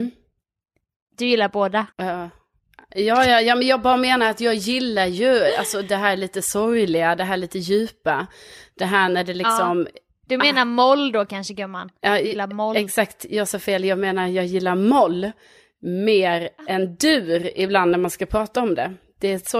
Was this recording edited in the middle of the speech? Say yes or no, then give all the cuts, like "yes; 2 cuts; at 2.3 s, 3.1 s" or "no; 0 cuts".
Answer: yes; 1 cut; at 1.9 s